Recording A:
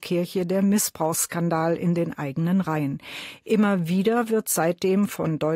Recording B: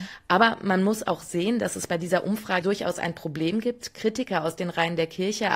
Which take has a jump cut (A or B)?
B